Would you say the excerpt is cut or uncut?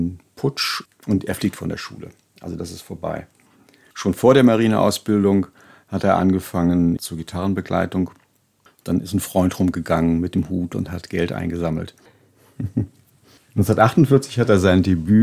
cut